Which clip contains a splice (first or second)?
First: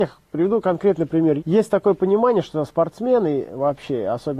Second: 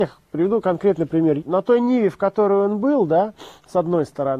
second